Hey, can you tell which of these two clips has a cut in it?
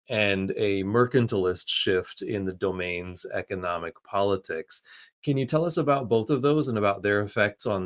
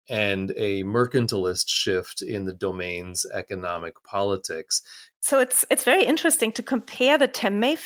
second; 1 cut; at 5.1 s

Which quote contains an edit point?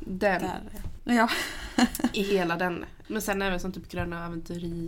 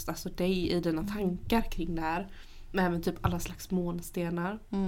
first; 2 cuts; at 1.0 s, 3.0 s

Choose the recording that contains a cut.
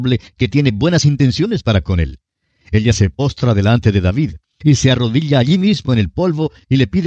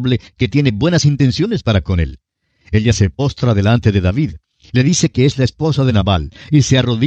first; 1 cut; at 4.6 s

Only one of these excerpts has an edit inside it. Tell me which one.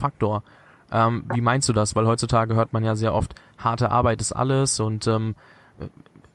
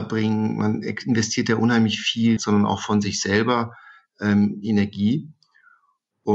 second; 1 cut; at 2.4 s

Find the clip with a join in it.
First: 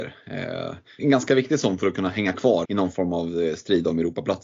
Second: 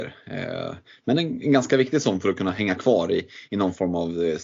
first; 2 cuts; at 1.0 s, 2.6 s

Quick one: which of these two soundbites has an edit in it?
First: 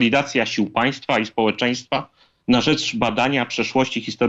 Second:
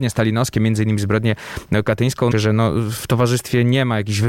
second; 1 cut; at 2.3 s

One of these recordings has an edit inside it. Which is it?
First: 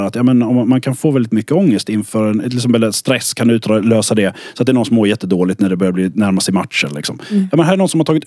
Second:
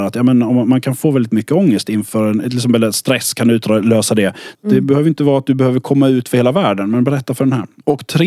second; 1 cut; at 4.5 s

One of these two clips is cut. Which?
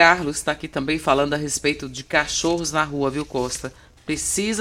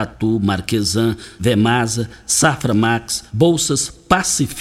second; 2 cuts; at 1.4 s, 3.3 s

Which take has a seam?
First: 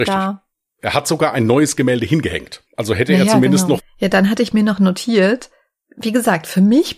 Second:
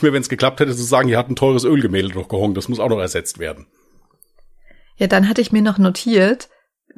first; 2 cuts; at 2.7 s, 3.8 s

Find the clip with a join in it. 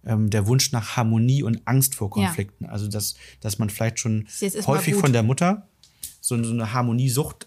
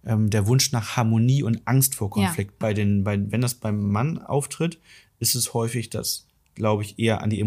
second; 1 cut; at 2.6 s

